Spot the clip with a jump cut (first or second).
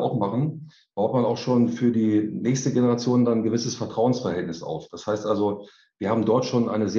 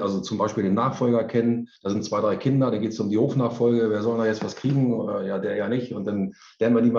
second